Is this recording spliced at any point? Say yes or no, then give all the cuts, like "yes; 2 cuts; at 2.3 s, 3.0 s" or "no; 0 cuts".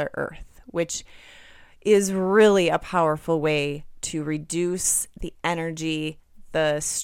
no; 0 cuts